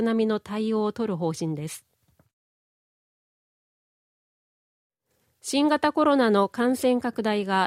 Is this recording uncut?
yes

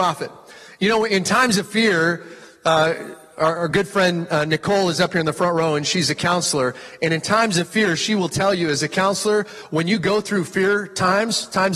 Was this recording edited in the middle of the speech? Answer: no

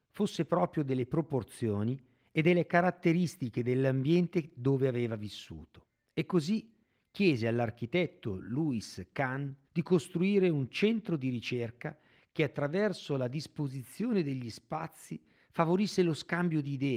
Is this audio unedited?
no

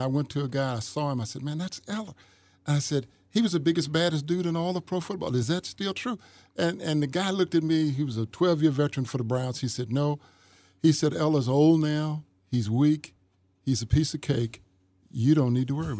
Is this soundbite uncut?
yes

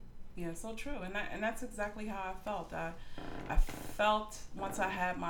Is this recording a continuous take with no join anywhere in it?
yes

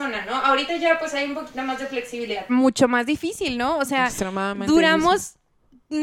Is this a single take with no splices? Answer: no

